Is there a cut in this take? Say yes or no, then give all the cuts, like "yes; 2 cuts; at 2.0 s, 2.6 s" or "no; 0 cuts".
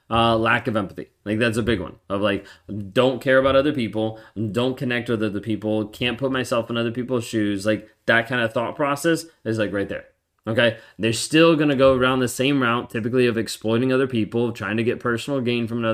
no; 0 cuts